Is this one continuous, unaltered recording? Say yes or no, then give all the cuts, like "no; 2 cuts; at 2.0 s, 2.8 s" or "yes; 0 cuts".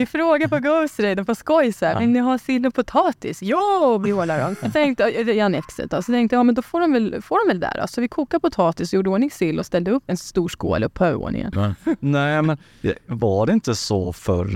no; 2 cuts; at 10.1 s, 11.5 s